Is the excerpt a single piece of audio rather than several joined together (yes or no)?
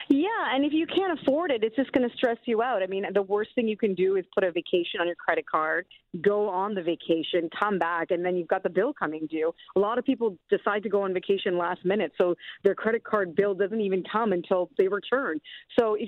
yes